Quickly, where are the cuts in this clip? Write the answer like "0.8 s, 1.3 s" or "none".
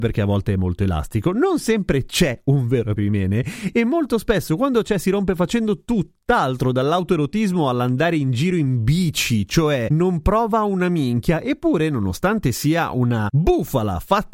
3.0 s